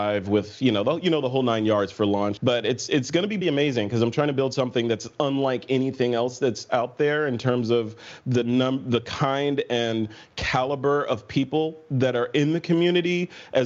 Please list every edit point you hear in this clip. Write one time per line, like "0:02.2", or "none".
0:02.4
0:03.4